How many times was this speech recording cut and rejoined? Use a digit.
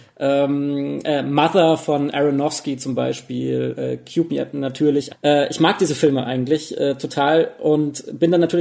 1